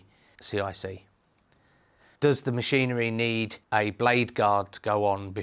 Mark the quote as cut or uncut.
cut